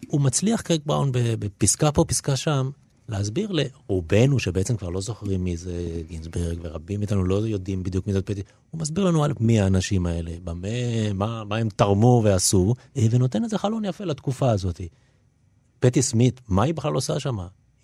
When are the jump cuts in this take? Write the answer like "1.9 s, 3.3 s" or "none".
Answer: 12.9 s